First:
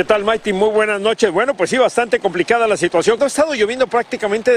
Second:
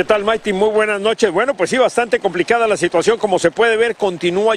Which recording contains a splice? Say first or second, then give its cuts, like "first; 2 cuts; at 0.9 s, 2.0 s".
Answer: first; 1 cut; at 3.2 s